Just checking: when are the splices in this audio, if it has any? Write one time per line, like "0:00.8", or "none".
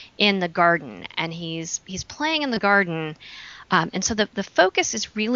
none